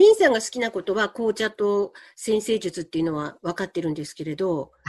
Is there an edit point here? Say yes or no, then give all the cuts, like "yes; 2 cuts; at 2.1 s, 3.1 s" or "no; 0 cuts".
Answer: no; 0 cuts